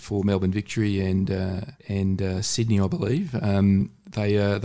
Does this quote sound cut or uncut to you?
cut